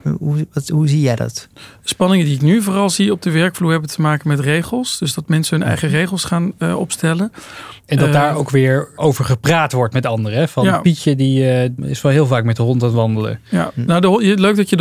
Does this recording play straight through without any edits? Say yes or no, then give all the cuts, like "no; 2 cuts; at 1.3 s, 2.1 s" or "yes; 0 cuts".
yes; 0 cuts